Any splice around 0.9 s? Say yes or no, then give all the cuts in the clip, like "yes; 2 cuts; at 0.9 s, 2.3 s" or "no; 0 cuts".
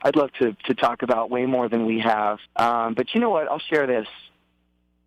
no; 1 cut; at 2.5 s